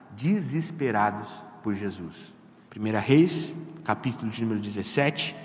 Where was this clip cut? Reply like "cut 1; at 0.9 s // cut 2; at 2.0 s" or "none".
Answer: cut 1; at 2.7 s